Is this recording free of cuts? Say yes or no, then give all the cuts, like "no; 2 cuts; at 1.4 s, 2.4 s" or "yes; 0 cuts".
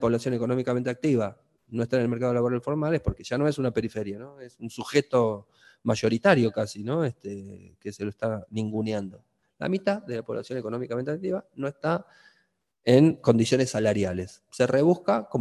yes; 0 cuts